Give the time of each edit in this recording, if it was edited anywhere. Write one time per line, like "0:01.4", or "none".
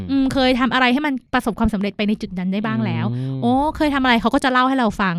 0:01.3